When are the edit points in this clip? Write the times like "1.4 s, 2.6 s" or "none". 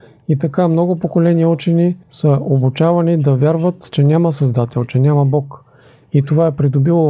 none